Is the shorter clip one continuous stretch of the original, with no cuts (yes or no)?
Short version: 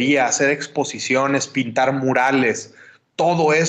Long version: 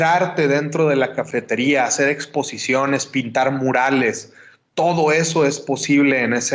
yes